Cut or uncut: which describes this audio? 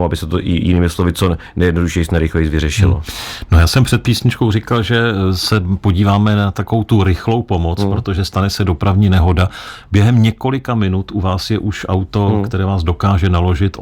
uncut